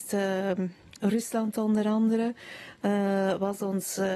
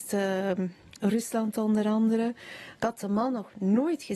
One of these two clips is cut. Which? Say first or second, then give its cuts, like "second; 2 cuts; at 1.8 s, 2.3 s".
second; 1 cut; at 2.7 s